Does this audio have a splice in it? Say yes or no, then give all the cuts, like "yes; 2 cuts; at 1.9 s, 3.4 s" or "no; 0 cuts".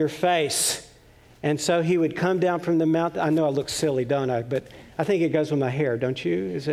no; 0 cuts